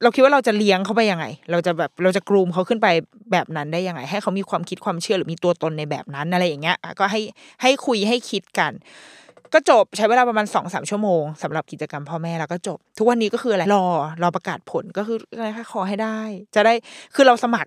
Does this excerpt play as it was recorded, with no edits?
no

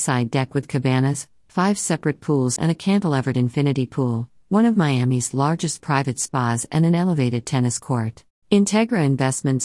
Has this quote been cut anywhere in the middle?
yes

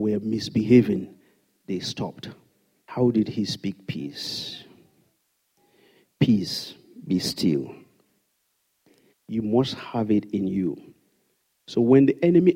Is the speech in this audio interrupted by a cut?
yes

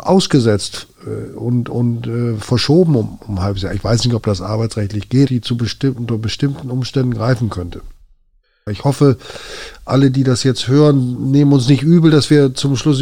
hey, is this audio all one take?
no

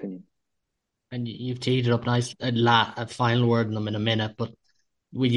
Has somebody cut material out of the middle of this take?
yes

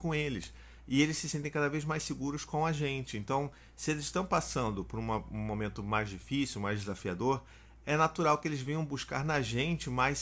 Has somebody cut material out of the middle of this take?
no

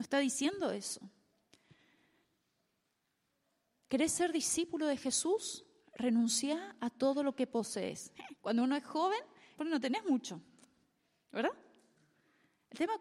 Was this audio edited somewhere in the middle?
yes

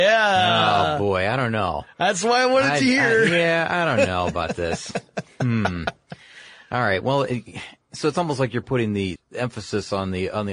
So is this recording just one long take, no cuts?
no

